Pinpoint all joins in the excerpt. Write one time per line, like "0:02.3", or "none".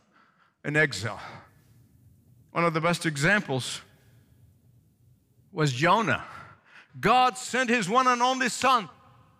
0:06.9

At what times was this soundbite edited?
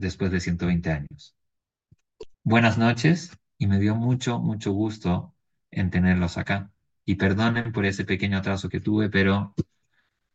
0:02.3

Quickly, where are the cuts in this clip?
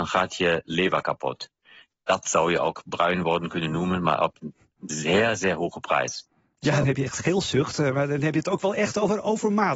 0:01.8
0:06.8

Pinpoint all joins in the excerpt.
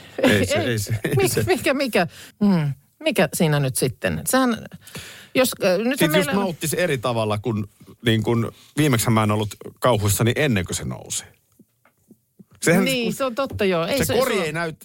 0:02.3

